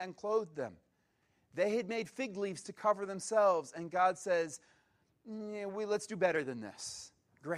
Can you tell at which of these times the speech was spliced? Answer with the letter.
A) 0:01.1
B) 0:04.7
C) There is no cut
C